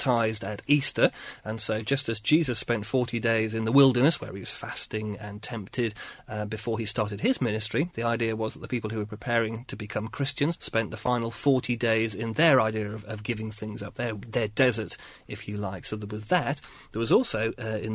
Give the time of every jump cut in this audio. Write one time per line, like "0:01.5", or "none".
0:10.6